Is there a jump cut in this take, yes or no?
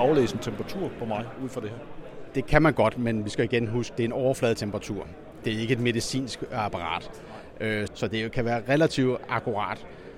yes